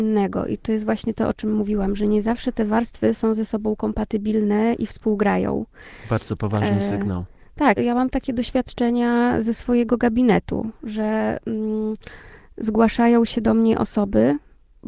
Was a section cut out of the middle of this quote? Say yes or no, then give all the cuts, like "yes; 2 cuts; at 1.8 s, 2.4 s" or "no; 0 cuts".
yes; 1 cut; at 7.8 s